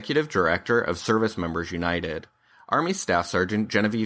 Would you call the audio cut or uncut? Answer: uncut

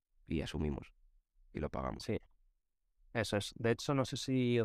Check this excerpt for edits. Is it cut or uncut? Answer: uncut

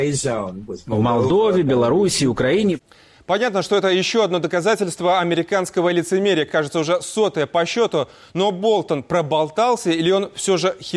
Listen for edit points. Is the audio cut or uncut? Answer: uncut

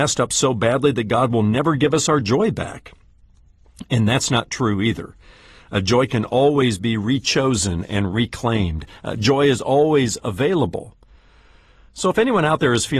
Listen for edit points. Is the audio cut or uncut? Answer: uncut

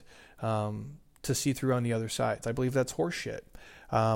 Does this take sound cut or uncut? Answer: cut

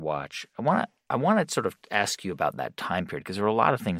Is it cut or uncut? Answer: uncut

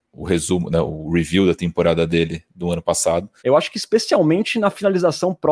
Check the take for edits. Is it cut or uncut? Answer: cut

